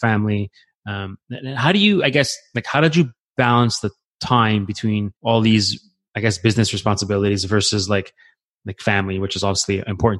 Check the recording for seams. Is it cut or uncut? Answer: cut